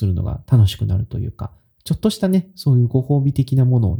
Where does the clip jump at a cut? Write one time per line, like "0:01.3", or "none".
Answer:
none